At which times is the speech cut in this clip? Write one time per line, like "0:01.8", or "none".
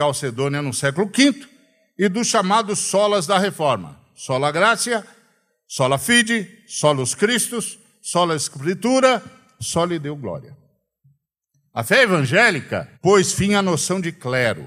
0:12.9